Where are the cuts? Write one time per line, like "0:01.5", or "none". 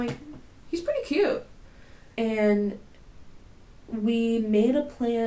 0:02.2

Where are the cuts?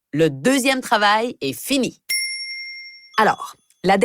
0:03.1

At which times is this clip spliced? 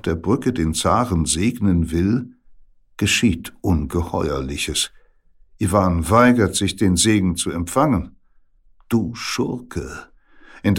none

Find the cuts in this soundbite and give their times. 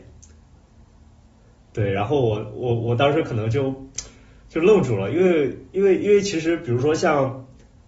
none

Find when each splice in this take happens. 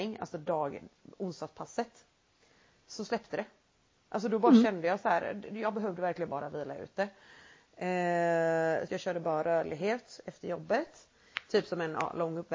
0:08.9

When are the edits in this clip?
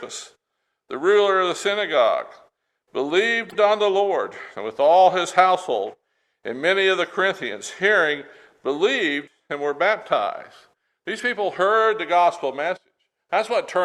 none

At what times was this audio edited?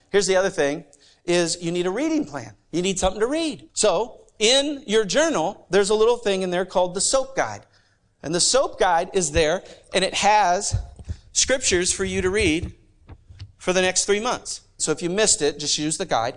0:03.7
0:14.8

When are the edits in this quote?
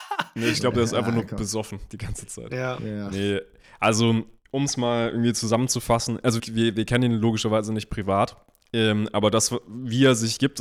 0:06.4

